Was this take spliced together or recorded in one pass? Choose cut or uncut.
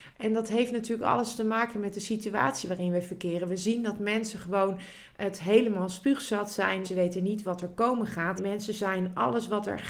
cut